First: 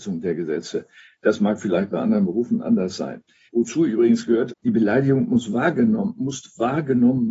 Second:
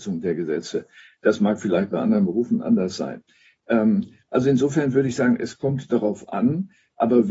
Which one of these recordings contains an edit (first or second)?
first